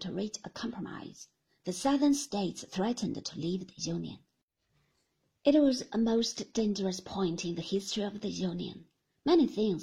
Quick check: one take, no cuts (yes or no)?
yes